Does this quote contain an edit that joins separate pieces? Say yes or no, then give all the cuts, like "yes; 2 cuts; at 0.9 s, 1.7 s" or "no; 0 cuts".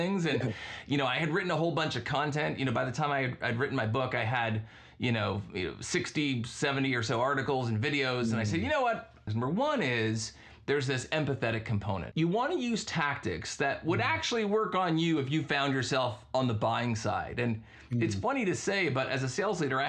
yes; 2 cuts; at 9.3 s, 12.1 s